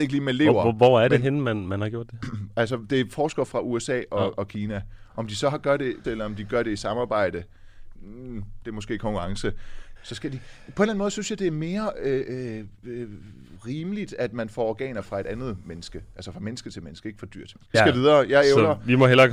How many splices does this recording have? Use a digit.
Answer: 3